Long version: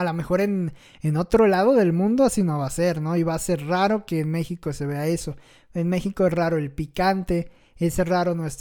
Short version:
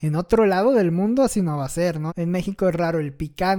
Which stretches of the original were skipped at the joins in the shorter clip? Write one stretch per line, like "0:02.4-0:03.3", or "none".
0:03.1-0:05.7